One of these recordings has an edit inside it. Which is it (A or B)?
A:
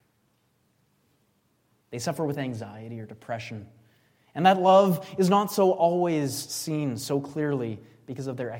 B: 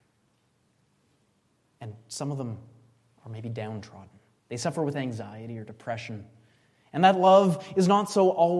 A